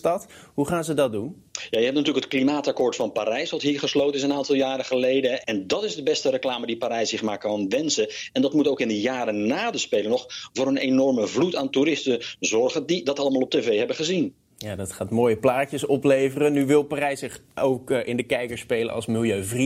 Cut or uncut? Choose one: cut